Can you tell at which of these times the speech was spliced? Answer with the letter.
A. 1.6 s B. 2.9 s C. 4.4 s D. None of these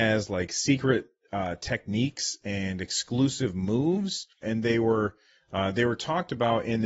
C